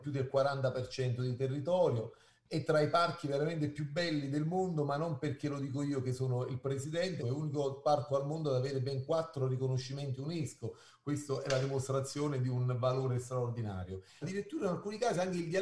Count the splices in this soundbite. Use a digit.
2